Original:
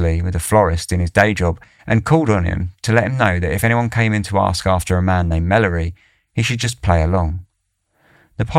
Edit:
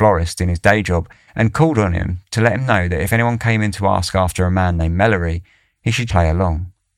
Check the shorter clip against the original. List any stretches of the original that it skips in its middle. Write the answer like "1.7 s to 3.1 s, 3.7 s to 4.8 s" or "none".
6.6 s to 6.8 s